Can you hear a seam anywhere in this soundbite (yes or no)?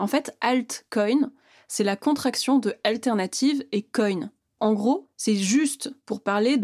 no